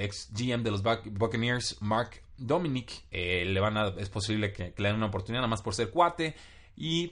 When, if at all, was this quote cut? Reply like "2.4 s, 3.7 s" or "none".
3.1 s